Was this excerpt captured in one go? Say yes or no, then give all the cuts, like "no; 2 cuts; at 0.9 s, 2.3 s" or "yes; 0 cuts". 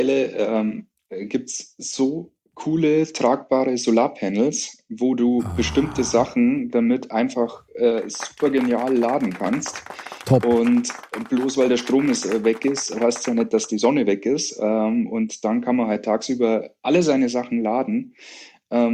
yes; 0 cuts